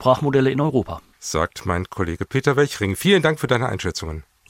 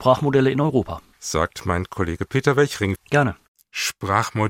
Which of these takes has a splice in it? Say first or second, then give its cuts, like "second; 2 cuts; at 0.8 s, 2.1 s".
second; 1 cut; at 3.0 s